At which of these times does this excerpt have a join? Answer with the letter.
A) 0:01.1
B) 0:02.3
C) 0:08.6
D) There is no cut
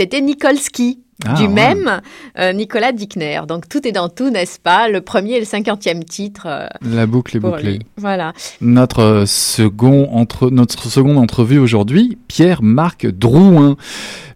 C